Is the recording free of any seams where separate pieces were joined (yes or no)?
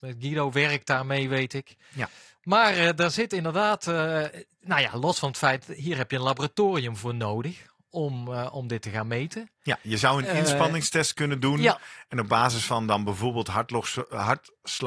yes